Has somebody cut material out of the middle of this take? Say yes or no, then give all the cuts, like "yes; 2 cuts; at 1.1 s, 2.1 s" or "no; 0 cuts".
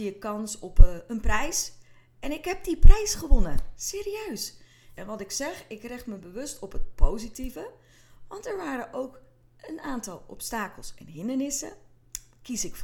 yes; 1 cut; at 4.9 s